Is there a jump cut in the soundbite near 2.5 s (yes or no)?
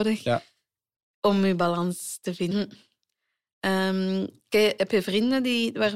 yes